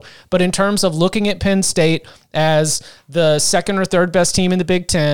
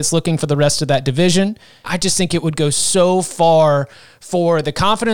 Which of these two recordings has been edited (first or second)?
second